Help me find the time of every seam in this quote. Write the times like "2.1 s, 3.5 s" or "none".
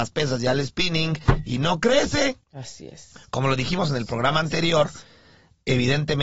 none